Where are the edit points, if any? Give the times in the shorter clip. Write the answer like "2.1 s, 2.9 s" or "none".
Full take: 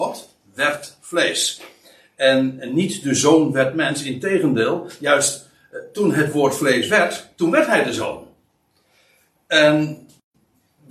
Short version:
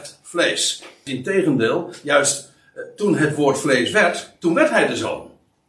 1.1 s